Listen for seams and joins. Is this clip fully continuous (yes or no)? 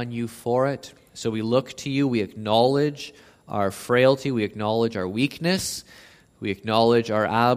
yes